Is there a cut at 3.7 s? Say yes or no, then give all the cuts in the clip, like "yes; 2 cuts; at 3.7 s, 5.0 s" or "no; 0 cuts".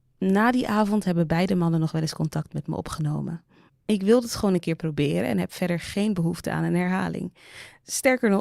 yes; 1 cut; at 3.7 s